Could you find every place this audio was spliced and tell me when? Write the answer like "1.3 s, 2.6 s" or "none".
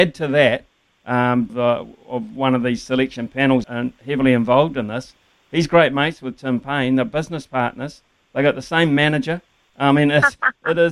1.5 s, 3.6 s